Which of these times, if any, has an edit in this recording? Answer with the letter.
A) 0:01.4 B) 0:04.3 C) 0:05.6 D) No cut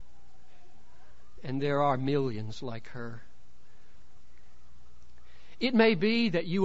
A